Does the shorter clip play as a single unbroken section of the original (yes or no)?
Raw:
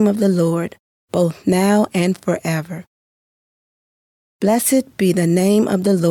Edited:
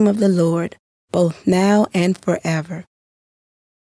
yes